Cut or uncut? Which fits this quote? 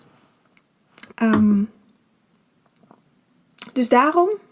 cut